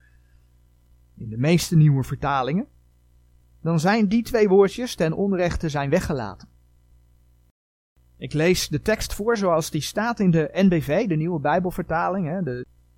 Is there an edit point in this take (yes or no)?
no